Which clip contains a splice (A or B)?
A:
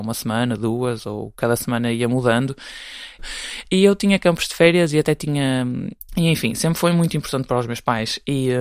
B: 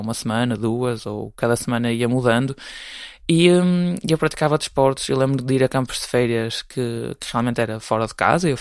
A